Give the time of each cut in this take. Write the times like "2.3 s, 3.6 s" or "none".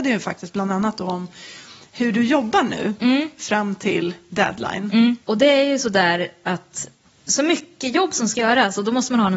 5.2 s